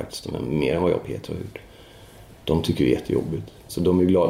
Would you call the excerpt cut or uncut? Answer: uncut